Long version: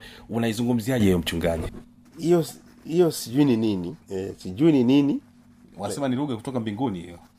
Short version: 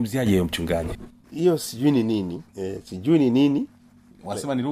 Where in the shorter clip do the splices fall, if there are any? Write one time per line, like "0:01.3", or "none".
0:01.2